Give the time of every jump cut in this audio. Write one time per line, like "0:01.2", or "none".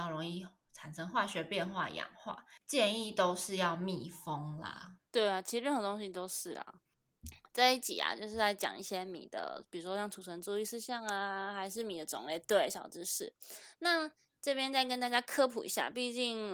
0:05.1

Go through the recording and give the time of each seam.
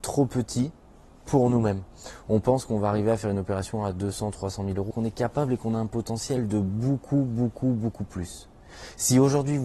0:04.9

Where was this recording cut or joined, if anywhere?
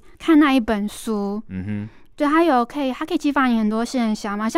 none

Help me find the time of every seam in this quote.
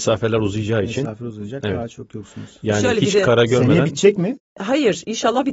none

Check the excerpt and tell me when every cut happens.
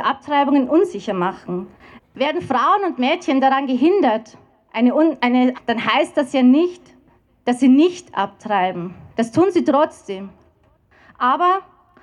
0:02.0
0:05.5
0:09.1

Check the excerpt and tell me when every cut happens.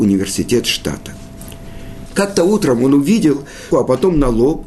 0:02.1
0:03.7

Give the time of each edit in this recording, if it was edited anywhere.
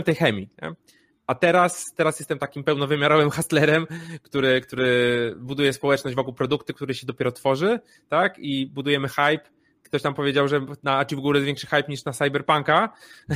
none

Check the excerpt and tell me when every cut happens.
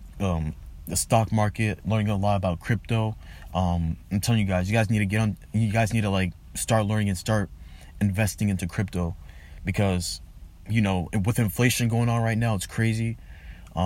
0:03.5

